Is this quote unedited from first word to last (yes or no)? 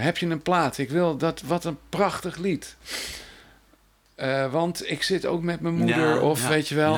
yes